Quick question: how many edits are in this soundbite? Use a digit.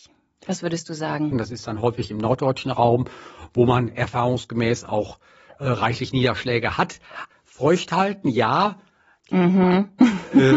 3